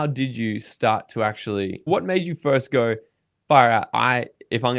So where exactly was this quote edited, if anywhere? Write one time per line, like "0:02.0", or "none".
0:01.9